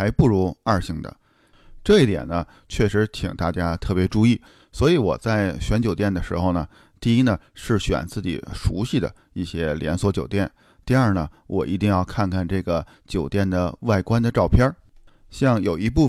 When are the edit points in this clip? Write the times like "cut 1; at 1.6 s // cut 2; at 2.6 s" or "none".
none